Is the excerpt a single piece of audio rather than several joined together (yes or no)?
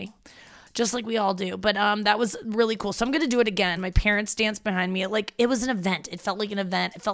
no